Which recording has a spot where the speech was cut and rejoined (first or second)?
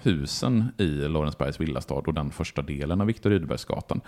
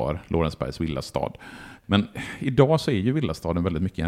second